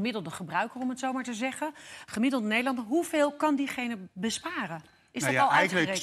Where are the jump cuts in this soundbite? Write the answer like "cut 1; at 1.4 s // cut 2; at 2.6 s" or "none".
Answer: none